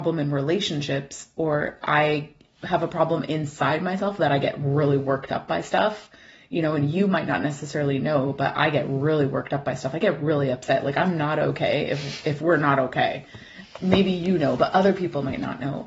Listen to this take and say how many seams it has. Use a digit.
0